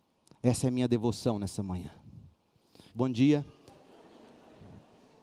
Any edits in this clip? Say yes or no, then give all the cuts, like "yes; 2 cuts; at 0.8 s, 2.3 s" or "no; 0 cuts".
yes; 1 cut; at 2.9 s